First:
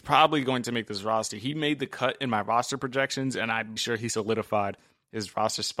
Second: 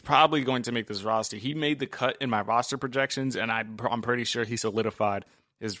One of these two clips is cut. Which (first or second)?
first